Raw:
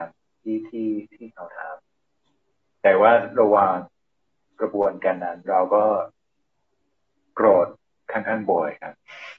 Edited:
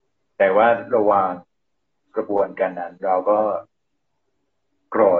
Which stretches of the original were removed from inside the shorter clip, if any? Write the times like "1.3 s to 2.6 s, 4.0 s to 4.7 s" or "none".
none